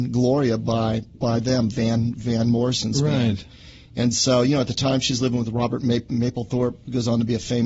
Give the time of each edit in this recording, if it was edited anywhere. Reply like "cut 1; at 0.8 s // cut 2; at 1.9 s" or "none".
none